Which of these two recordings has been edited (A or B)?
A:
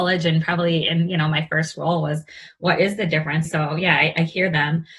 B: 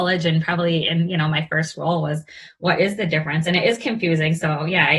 A